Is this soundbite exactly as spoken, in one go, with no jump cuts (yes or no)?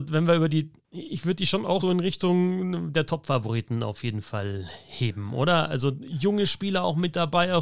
no